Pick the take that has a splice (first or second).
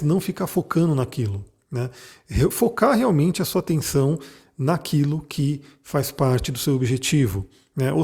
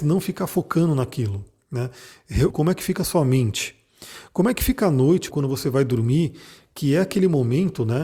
second